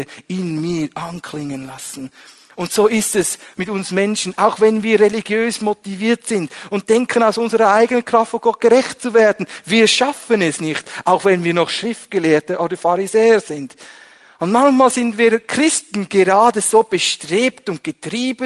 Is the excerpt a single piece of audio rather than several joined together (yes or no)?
no